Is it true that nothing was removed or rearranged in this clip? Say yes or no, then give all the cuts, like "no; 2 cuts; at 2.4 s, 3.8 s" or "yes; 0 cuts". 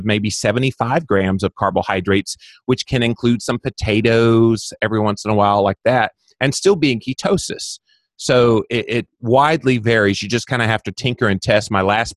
yes; 0 cuts